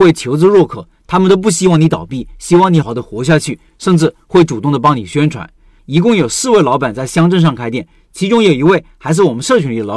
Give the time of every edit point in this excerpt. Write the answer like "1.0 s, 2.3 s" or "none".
2.8 s, 5.8 s